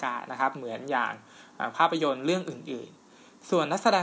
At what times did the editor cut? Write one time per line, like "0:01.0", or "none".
0:03.0